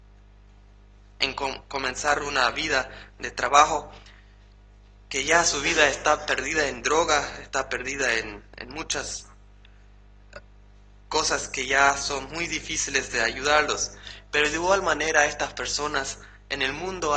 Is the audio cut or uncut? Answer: uncut